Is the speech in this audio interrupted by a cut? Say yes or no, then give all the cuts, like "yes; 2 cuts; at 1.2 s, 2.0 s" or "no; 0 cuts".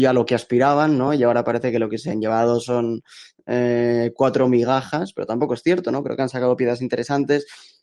no; 0 cuts